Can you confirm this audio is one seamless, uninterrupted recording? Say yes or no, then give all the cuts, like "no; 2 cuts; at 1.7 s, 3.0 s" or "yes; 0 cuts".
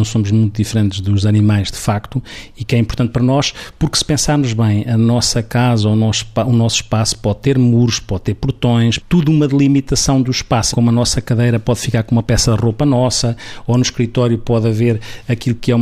no; 2 cuts; at 9.0 s, 10.7 s